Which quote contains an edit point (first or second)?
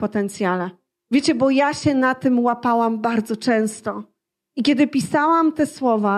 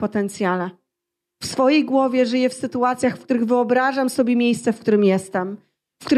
first